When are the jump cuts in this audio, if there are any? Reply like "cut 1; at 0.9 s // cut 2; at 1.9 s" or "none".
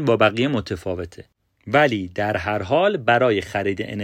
none